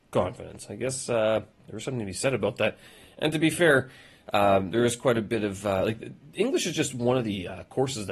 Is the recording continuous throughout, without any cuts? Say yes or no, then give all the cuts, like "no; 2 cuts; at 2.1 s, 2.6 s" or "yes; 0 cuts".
no; 1 cut; at 1.5 s